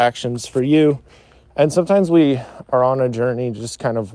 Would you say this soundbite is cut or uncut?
uncut